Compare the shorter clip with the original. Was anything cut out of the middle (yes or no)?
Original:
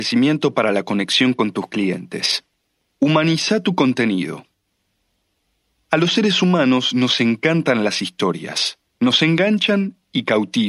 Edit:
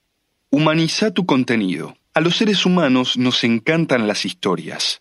yes